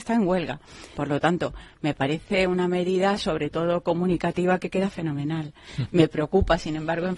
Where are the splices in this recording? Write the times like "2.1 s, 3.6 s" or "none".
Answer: 1.0 s

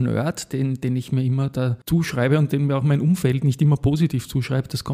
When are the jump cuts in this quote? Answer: 1.8 s

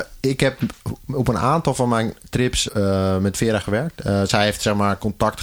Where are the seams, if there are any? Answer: 2.7 s

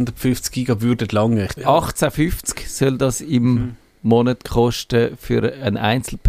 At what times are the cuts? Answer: 1.6 s

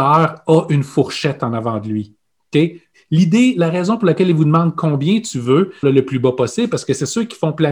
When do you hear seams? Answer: 2.9 s, 5.8 s

